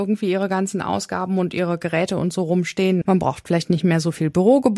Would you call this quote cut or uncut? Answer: cut